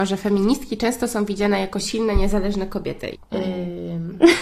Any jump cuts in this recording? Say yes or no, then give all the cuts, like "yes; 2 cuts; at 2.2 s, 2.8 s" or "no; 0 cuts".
yes; 1 cut; at 3.1 s